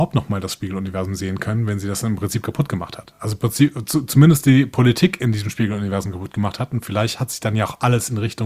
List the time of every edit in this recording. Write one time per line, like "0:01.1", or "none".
none